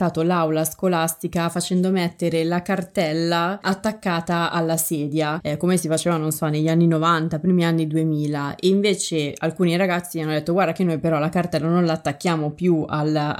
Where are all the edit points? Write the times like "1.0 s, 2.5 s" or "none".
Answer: none